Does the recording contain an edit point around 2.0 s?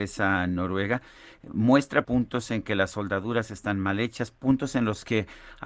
yes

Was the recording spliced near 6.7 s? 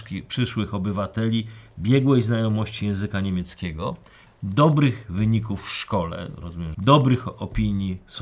yes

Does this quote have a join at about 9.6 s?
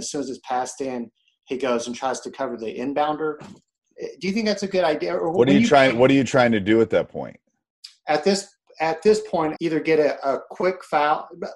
yes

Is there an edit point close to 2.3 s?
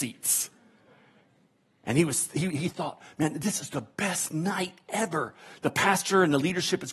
no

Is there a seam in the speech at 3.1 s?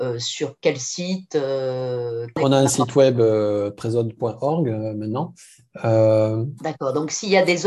no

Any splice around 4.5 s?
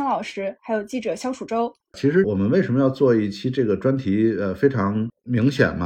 no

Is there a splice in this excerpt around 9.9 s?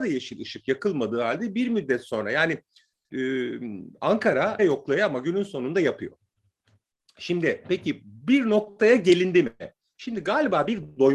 no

